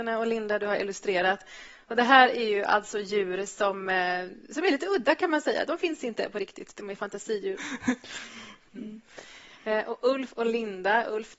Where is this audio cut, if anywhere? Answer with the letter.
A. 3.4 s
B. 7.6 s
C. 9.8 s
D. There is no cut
B